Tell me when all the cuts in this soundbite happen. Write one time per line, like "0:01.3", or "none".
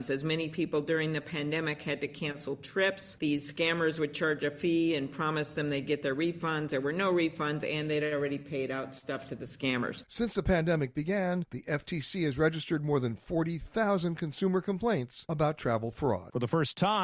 none